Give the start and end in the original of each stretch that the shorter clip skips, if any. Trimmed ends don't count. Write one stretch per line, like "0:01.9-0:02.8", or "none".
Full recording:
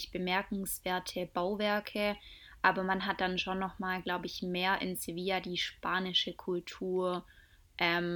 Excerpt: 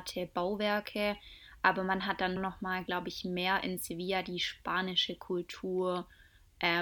0:03.4-0:03.5

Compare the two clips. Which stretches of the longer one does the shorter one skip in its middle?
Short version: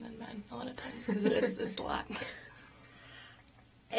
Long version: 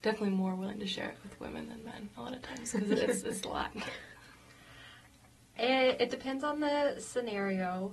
none

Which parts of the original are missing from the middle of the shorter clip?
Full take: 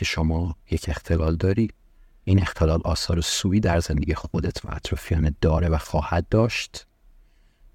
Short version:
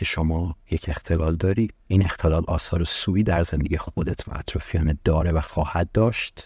0:01.8-0:02.2

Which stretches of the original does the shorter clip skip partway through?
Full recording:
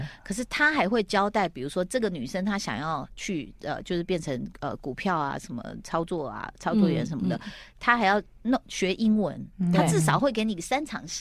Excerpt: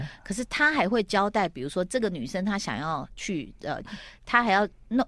0:03.8-0:07.4

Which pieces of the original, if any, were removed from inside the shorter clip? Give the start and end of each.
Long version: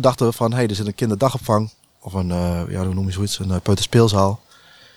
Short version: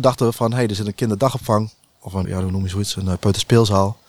0:02.2-0:02.7

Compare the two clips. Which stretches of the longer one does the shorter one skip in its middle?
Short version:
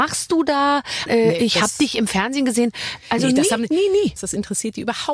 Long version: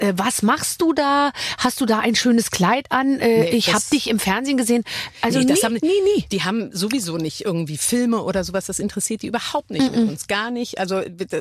0:01.6-0:03.2
0:06.3-0:08.6

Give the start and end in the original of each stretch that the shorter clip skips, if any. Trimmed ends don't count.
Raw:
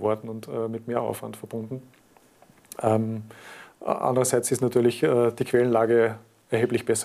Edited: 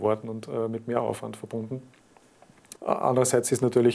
0:02.7-0:03.7

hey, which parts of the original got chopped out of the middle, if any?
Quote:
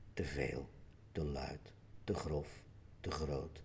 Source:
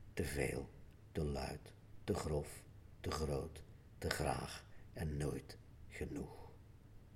none

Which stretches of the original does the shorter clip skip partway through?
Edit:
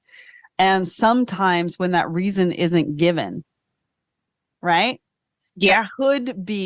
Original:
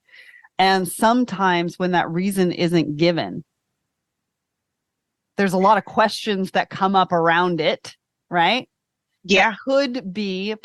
0:04.5-0:08.2

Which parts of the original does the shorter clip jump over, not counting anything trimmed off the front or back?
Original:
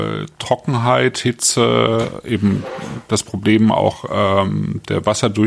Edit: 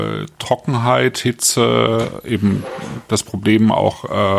none

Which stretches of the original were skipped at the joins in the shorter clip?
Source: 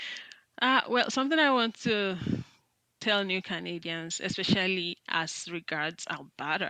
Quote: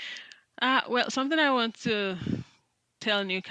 none

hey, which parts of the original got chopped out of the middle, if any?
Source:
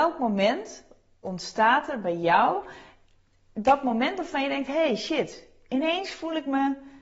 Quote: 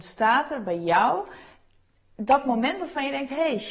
none

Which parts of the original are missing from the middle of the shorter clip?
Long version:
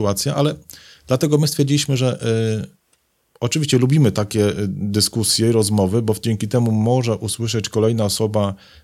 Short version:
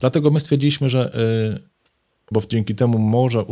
0:03.4-0:06.0

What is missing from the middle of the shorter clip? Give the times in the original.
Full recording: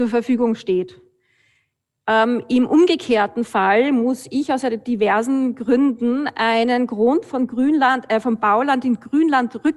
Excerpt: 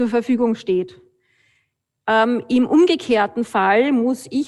none

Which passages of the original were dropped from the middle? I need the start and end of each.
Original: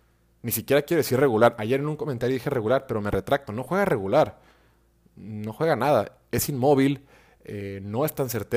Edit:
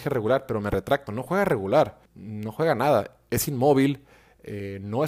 0:04.5-0:05.1

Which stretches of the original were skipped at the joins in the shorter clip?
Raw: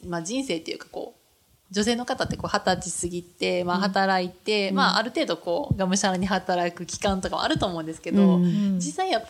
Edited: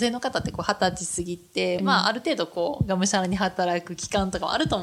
0:03.6-0:04.7

